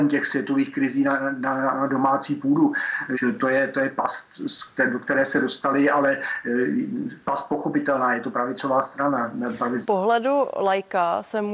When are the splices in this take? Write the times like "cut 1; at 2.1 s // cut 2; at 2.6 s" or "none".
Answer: cut 1; at 3.1 s // cut 2; at 9.8 s